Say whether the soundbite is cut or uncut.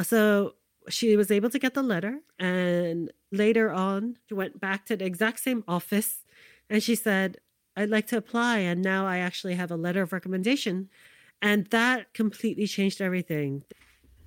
uncut